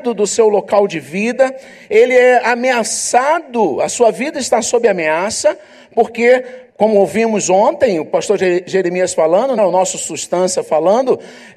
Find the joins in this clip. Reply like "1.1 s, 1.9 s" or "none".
6.7 s, 9.6 s